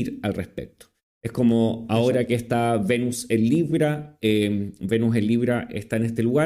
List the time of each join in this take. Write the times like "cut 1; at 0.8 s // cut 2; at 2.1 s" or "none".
none